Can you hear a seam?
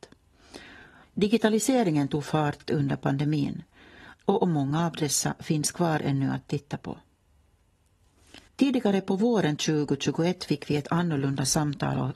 yes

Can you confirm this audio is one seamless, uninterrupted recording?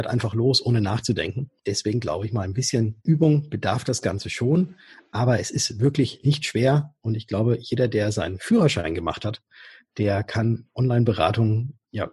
yes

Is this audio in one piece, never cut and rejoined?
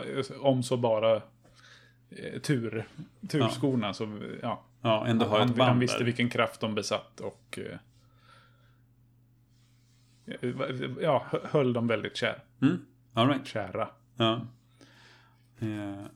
yes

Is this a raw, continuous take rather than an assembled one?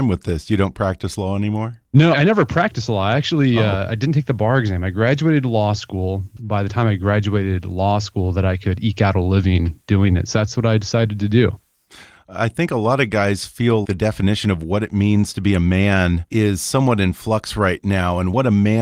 no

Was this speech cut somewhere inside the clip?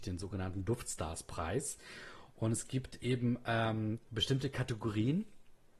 no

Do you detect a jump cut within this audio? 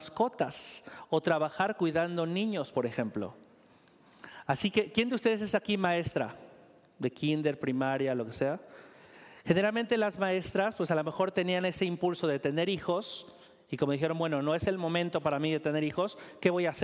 no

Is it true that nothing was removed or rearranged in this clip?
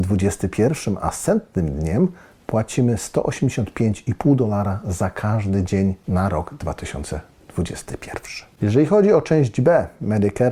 no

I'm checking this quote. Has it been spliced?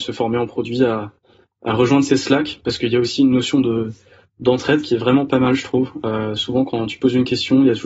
no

